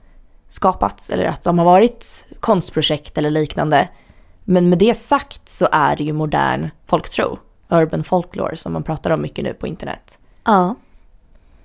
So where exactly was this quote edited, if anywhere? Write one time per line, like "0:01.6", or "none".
none